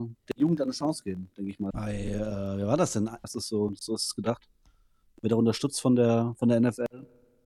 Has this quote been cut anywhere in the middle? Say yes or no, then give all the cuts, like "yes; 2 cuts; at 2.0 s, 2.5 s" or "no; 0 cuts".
yes; 2 cuts; at 1.7 s, 3.2 s